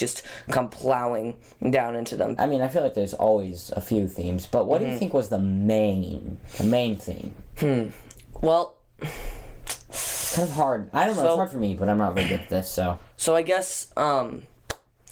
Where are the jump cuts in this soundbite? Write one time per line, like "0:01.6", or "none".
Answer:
0:02.4